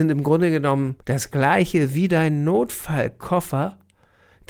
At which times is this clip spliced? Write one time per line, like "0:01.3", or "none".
0:01.0